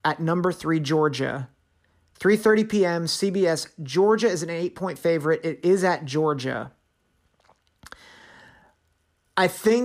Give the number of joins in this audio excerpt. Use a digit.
0